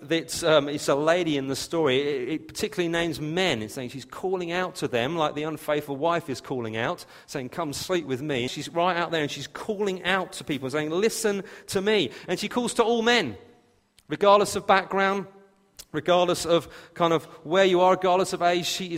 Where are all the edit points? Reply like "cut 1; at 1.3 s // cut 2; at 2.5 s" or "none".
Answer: cut 1; at 8.5 s